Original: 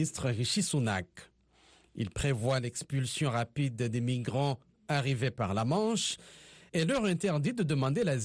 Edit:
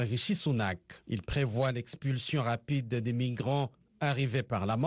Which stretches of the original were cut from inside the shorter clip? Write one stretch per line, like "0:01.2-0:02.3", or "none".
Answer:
0:01.3-0:01.9